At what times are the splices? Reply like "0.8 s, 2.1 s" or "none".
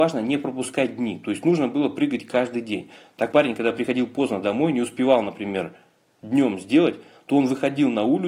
3.3 s